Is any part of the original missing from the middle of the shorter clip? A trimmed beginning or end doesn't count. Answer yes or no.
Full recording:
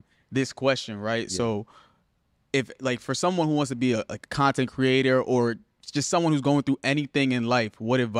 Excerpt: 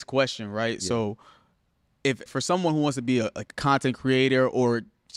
yes